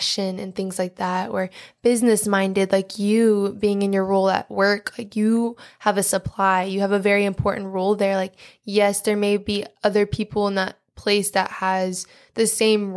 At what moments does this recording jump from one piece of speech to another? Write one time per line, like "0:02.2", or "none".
none